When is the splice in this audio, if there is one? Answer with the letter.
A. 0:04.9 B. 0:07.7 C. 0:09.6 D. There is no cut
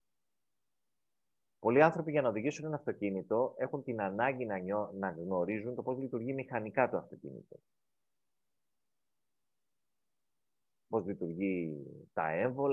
D